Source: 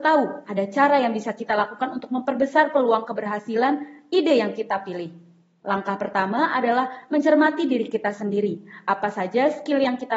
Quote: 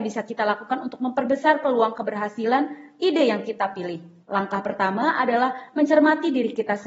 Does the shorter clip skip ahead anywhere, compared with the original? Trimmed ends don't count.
yes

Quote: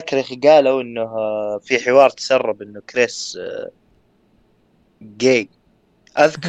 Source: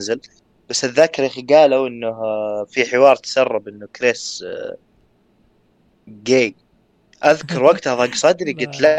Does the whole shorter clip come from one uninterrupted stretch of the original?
yes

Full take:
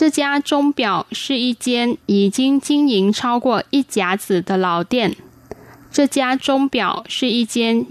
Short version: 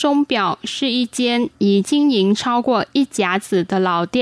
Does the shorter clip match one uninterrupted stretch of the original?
no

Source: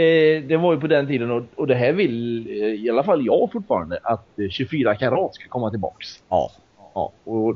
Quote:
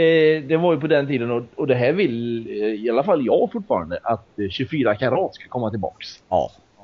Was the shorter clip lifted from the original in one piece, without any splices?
yes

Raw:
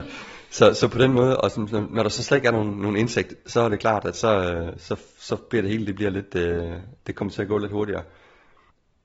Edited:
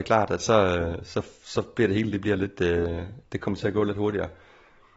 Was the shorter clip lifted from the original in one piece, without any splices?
yes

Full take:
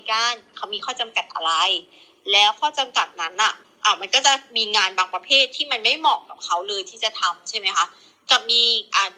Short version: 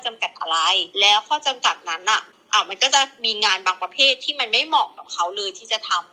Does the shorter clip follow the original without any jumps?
no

